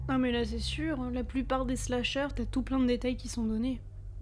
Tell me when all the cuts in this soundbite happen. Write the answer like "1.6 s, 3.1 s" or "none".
2.3 s